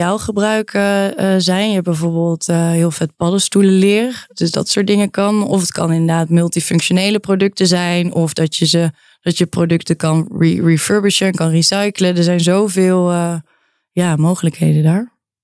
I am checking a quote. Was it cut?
no; 0 cuts

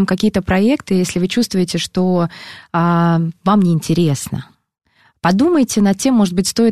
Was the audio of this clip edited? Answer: no; 0 cuts

